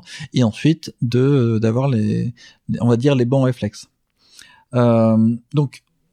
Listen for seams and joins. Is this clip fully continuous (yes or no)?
yes